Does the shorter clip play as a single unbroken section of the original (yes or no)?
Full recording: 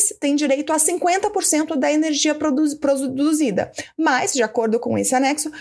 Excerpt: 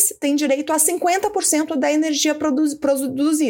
yes